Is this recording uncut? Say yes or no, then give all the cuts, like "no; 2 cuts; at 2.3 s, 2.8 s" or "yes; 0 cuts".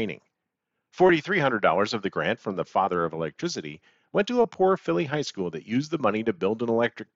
yes; 0 cuts